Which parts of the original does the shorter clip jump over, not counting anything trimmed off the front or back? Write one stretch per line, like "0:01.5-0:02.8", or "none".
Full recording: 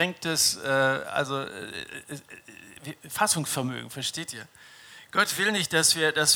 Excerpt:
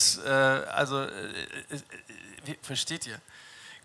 0:03.0-0:03.9